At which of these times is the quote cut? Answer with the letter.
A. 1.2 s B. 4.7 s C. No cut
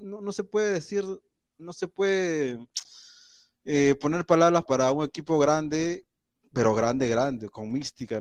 B